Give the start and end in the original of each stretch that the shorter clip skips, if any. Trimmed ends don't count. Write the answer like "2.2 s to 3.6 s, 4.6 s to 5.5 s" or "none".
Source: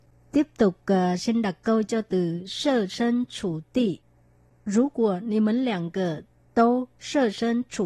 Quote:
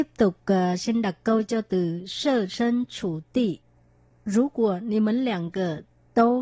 none